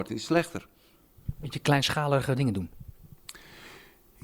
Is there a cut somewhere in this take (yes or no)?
no